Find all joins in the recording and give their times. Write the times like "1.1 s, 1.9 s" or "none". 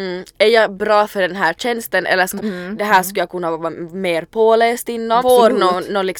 2.4 s, 5.2 s

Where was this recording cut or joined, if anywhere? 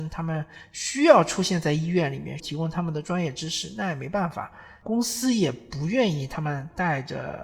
2.4 s, 4.8 s

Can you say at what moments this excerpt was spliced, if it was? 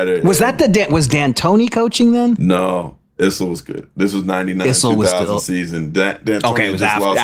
none

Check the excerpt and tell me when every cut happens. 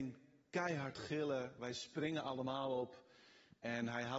1.6 s

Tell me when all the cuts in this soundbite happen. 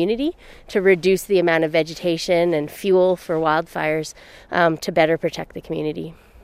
none

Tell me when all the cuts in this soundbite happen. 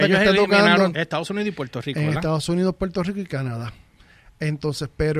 0.9 s

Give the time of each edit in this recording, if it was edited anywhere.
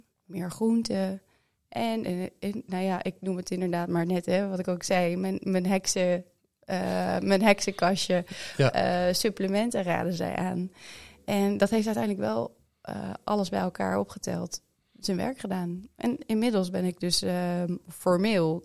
none

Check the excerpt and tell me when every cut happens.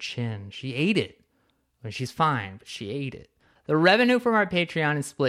3.6 s

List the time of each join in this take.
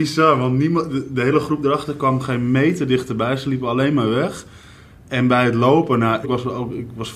6.2 s

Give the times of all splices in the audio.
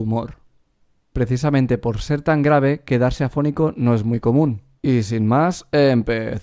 4.7 s

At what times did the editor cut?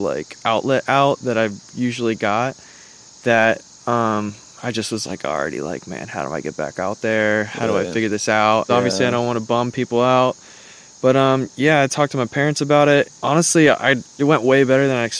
8.7 s, 13.0 s

